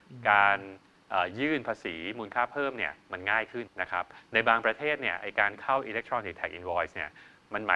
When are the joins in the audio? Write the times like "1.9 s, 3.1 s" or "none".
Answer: 3.7 s